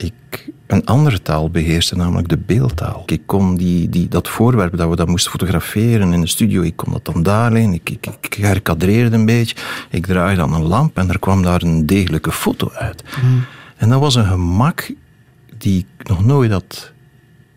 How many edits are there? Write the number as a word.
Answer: one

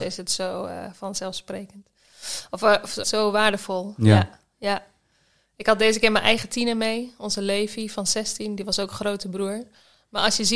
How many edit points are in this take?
one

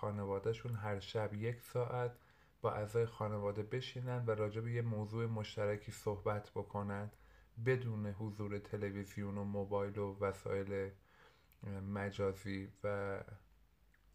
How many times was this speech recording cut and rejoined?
zero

